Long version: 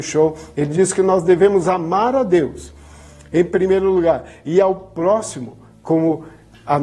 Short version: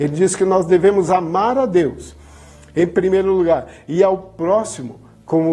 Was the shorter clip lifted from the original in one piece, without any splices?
yes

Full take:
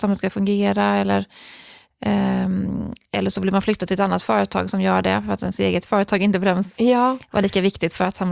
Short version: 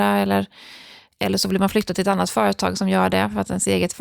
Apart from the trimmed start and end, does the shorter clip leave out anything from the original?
yes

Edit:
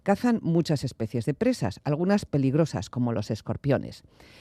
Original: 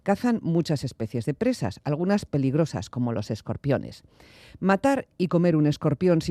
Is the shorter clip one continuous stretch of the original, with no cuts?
yes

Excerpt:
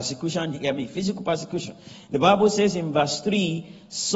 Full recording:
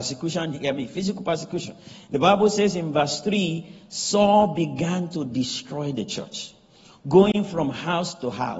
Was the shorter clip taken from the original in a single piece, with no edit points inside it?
yes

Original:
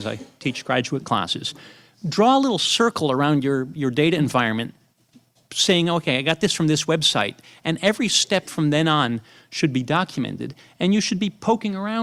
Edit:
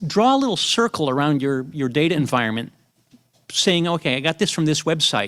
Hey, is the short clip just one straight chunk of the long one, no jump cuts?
yes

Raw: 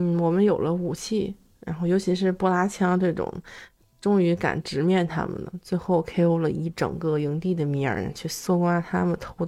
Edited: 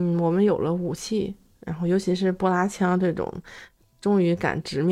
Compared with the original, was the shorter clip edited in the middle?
no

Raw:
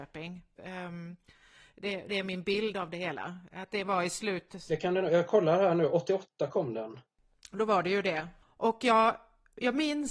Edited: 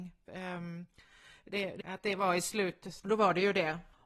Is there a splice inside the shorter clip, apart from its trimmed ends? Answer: yes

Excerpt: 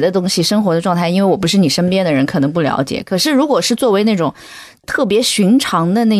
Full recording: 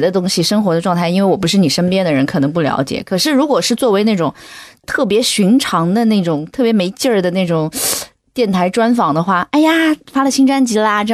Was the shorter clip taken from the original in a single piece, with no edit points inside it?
yes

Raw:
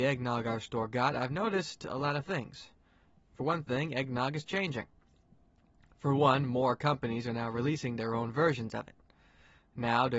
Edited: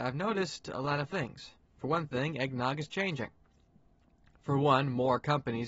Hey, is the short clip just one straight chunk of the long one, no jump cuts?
no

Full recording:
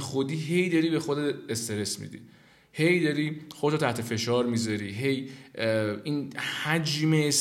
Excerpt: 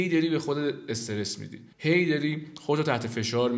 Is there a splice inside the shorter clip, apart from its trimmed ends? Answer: yes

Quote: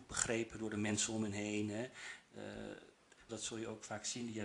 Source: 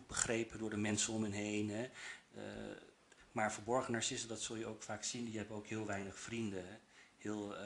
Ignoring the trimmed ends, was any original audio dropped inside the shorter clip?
yes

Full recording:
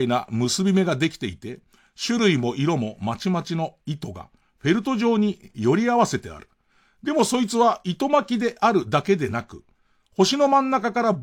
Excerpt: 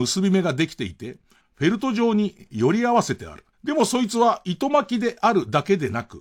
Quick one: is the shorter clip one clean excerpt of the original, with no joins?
no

